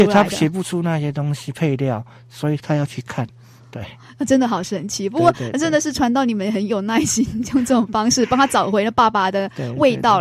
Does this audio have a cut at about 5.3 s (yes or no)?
no